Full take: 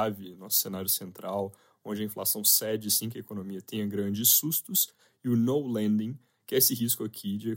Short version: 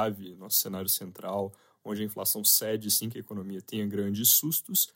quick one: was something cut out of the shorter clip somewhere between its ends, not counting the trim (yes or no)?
no